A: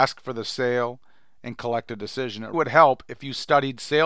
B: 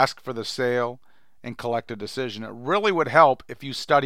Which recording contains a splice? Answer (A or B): A